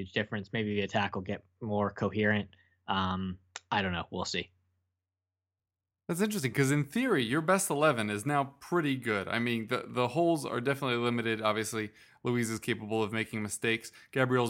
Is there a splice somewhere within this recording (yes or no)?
no